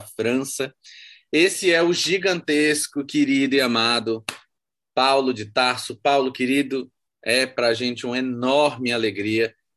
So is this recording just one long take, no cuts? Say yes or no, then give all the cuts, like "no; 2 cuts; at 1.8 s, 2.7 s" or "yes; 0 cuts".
yes; 0 cuts